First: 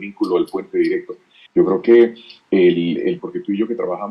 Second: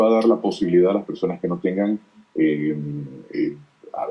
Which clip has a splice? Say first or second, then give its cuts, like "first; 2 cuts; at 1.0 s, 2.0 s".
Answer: first; 2 cuts; at 1.5 s, 3.2 s